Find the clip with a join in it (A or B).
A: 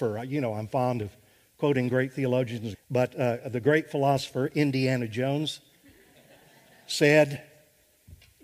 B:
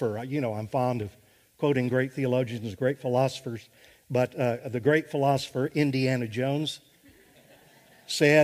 A